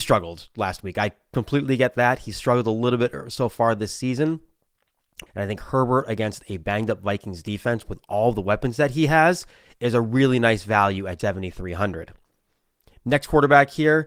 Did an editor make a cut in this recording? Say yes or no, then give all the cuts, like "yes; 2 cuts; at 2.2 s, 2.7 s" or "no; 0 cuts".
yes; 2 cuts; at 5.3 s, 11.2 s